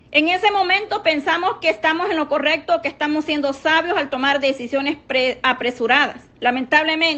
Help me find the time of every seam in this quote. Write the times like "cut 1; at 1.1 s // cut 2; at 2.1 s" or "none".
none